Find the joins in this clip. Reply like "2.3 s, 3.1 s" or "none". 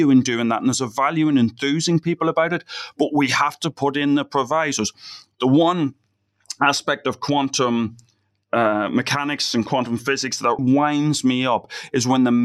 10.6 s